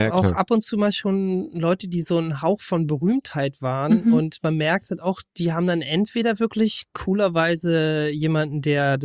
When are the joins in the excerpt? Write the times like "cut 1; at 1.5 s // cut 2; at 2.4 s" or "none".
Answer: none